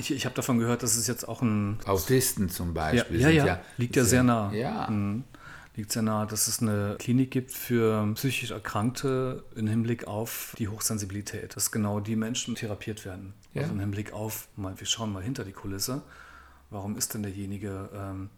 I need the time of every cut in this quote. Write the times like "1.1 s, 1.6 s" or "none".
13.4 s